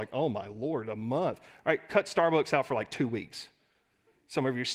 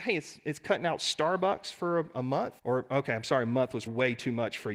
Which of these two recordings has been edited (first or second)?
second